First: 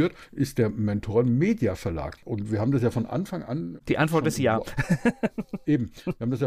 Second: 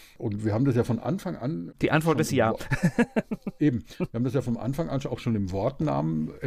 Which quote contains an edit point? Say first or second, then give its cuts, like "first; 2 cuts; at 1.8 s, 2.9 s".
first; 1 cut; at 2.2 s